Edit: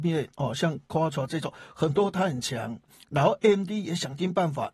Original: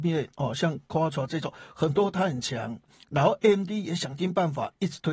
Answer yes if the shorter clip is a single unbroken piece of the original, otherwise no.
yes